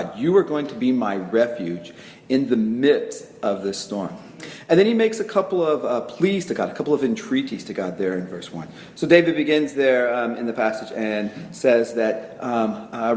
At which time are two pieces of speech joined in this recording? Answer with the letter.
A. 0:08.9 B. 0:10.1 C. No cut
A